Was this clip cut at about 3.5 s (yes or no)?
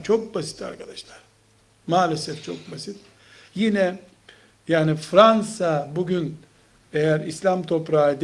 yes